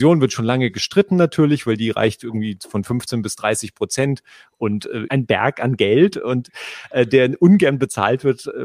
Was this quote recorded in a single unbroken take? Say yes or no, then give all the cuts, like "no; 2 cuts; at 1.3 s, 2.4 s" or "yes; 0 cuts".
no; 1 cut; at 5.1 s